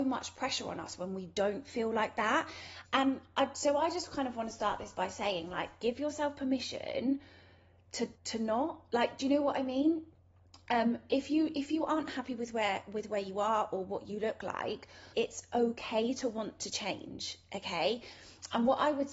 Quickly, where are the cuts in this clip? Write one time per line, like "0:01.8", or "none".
0:02.8
0:08.1
0:15.1